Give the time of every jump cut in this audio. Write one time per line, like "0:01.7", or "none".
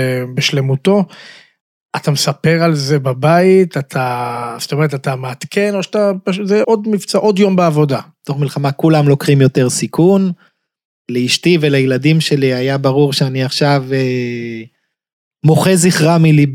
0:06.6
0:08.2